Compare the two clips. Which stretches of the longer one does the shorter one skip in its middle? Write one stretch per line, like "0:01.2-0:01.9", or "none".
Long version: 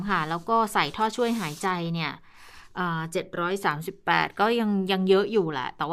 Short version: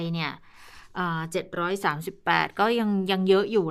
none

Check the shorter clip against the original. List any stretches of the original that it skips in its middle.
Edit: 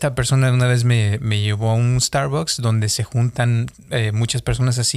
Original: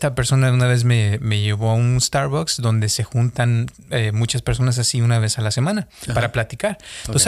none

